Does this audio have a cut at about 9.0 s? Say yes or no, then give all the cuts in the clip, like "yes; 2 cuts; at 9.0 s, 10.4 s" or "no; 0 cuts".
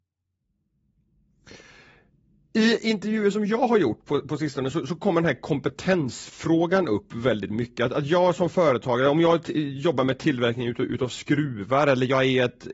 no; 0 cuts